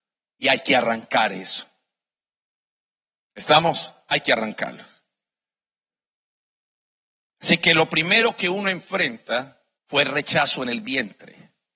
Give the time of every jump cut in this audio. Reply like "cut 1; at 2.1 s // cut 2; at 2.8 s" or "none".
cut 1; at 9.8 s

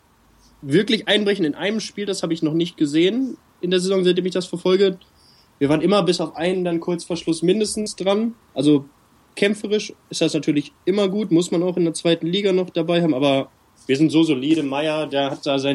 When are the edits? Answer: cut 1; at 8.4 s

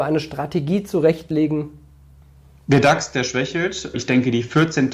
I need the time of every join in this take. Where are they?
cut 1; at 3.9 s

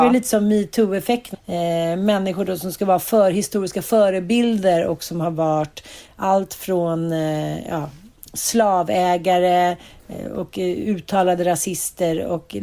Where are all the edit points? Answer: cut 1; at 1.3 s

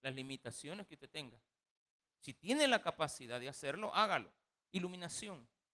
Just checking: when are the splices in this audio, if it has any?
cut 1; at 2.0 s // cut 2; at 4.6 s

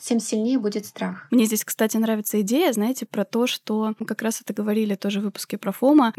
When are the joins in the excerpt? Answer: cut 1; at 1.3 s // cut 2; at 4.0 s

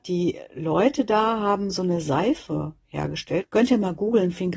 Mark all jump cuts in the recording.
cut 1; at 3.4 s

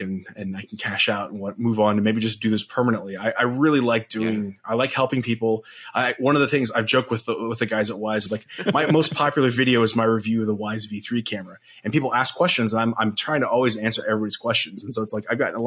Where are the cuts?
cut 1; at 8.3 s

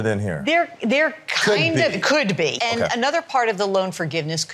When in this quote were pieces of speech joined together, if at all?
cut 1; at 2.6 s

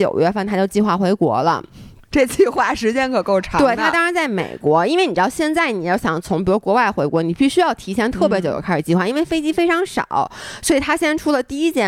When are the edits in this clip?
none

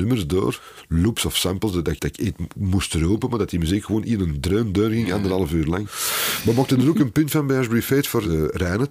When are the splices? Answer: cut 1; at 2.0 s

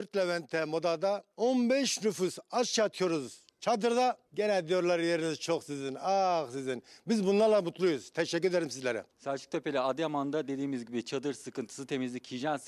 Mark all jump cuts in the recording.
cut 1; at 1.3 s // cut 2; at 4.3 s // cut 3; at 9.1 s

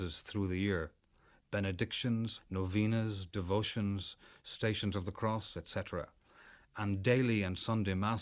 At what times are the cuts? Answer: cut 1; at 2.4 s

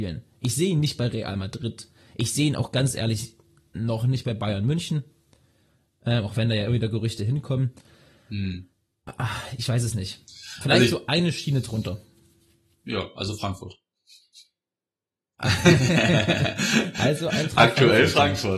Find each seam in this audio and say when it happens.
none

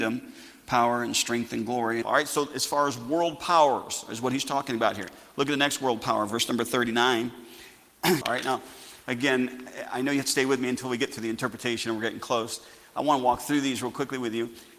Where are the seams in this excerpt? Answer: cut 1; at 2.0 s // cut 2; at 8.2 s

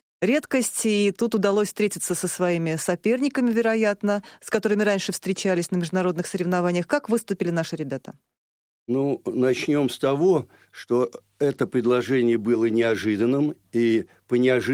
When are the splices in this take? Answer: none

